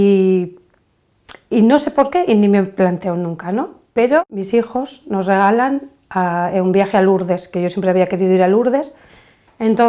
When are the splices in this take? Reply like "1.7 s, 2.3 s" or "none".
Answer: none